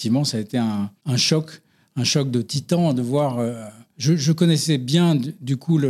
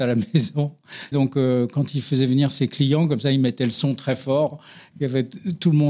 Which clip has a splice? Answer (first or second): second